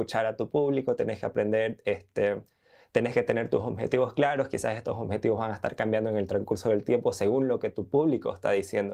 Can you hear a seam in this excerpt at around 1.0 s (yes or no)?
no